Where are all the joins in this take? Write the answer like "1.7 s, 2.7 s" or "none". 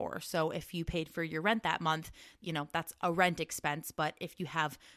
2.4 s